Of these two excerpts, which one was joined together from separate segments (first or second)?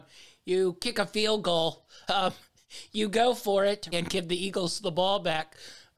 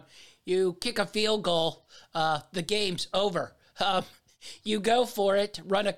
first